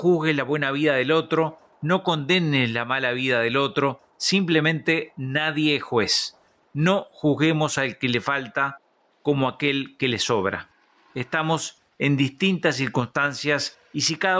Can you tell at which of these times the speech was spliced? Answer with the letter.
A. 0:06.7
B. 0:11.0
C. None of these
C